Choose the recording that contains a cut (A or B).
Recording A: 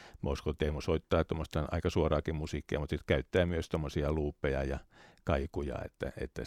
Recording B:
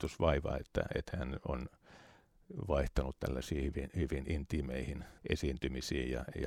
B